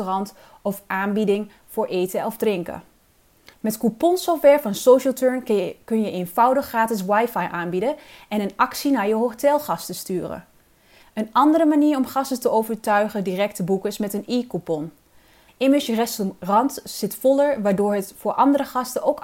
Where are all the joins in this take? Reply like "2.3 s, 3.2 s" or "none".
3.5 s, 11.0 s, 15.5 s